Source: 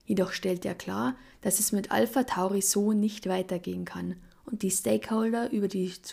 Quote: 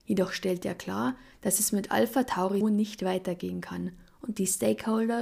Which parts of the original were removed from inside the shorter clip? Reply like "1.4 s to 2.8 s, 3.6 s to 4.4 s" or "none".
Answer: 2.6 s to 2.8 s